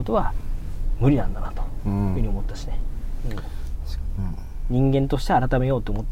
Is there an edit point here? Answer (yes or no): yes